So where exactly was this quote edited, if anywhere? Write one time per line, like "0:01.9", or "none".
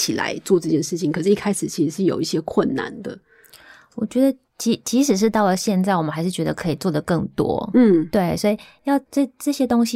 0:09.1